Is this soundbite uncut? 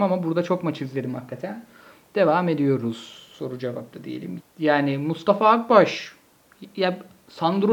no; 1 cut; at 4.4 s

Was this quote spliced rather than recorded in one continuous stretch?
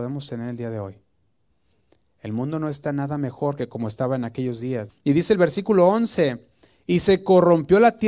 yes; 1 cut; at 4.9 s

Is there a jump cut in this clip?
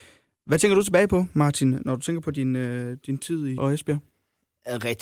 yes; 1 cut; at 3.6 s

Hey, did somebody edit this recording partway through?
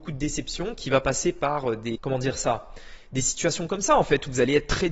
yes; 1 cut; at 1.9 s

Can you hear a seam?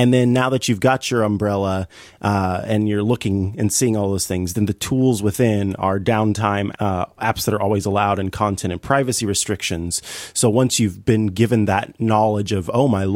yes; 1 cut; at 6.7 s

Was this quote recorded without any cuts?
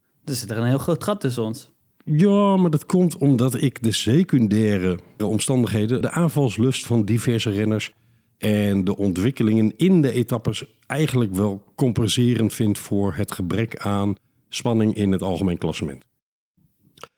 no; 1 cut; at 6.0 s

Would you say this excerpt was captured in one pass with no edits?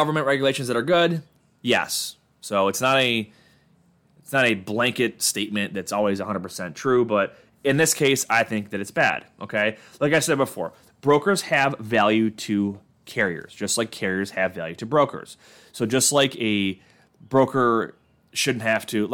yes; 0 cuts

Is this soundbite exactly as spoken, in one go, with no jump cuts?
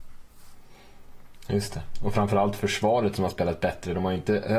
yes; 0 cuts

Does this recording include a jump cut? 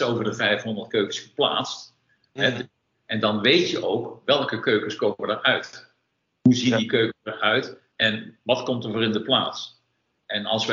no; 0 cuts

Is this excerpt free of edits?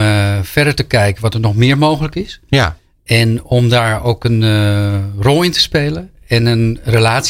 yes; 0 cuts

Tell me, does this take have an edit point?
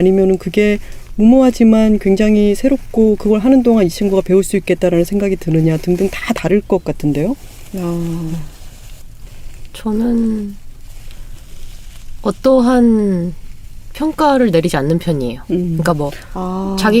yes; 1 cut; at 9.3 s

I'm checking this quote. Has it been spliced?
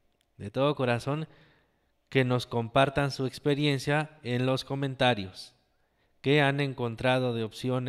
no; 0 cuts

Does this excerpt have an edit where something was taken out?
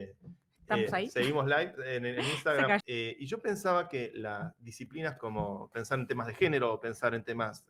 yes; 2 cuts; at 2.8 s, 5.7 s

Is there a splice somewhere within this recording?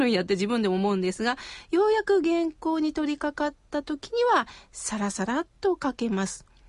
no; 0 cuts

